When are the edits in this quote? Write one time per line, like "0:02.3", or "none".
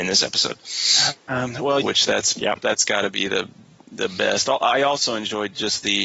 0:01.8